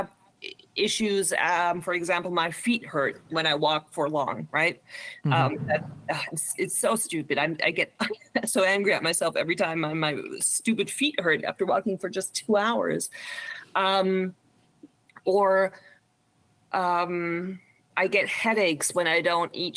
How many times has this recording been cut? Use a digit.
0